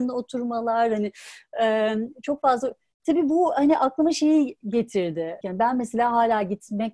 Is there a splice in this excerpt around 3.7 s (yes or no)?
no